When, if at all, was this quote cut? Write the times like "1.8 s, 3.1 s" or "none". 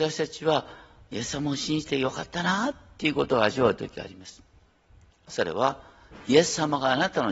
none